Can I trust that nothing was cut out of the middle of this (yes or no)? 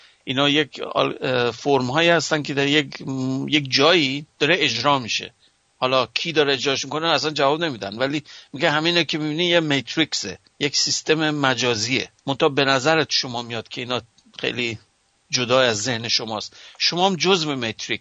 no